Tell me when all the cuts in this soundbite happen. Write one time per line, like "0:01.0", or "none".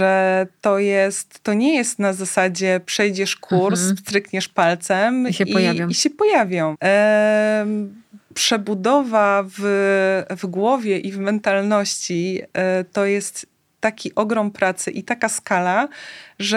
0:06.7